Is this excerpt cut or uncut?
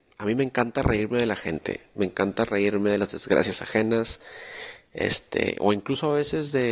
uncut